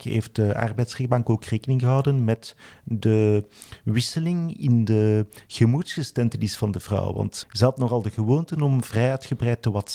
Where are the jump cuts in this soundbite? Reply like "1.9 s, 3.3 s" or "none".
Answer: 7.4 s